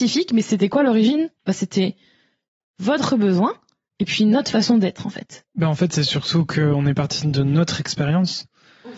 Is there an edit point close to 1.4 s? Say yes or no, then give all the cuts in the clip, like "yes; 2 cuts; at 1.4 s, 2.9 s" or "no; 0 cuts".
yes; 2 cuts; at 1.4 s, 5.4 s